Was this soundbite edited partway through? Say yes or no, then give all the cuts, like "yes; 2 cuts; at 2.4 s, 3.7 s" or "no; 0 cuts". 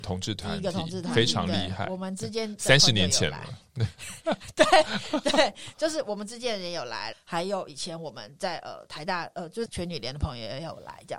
yes; 2 cuts; at 7.1 s, 9.7 s